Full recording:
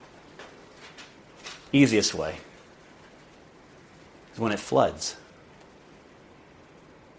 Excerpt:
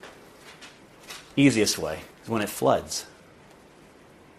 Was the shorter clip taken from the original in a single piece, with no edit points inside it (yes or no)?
no